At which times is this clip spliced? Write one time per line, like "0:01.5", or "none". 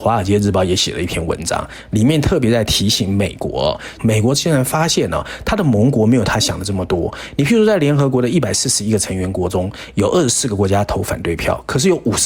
0:04.0